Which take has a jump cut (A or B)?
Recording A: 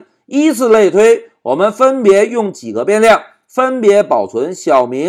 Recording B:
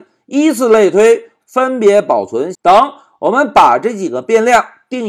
B